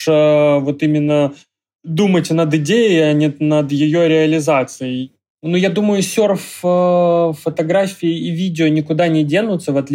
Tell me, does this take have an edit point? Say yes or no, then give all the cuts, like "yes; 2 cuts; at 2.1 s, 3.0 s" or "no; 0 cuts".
no; 0 cuts